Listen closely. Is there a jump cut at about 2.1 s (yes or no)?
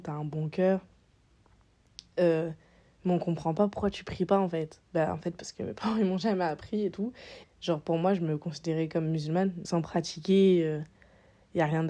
no